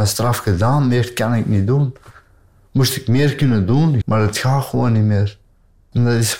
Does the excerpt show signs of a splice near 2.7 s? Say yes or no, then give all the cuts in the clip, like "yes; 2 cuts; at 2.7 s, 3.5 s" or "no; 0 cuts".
no; 1 cut; at 4.0 s